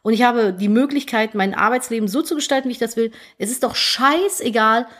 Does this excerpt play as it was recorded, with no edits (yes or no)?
yes